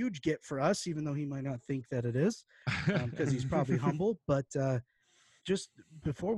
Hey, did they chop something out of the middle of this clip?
yes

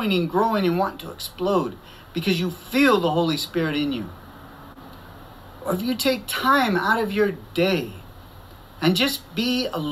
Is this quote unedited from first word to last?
yes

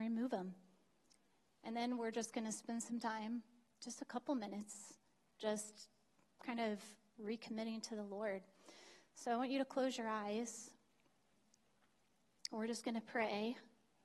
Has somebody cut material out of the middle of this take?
no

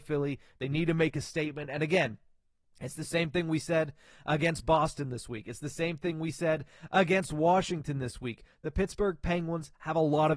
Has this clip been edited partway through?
no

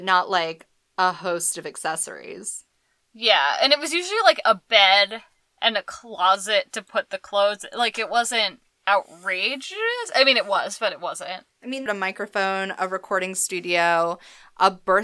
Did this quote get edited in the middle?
yes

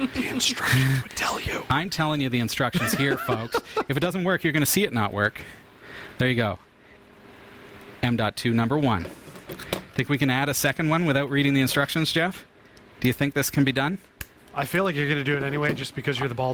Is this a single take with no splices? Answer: yes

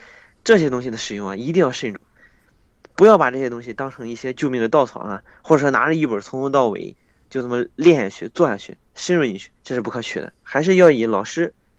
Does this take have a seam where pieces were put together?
yes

